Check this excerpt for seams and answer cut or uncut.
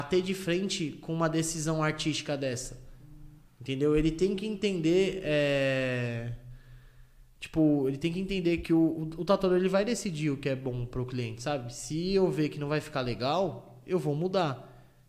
cut